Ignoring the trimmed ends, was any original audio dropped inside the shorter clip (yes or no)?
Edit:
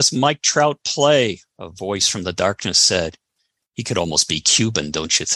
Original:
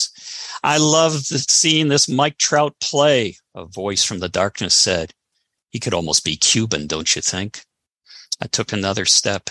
no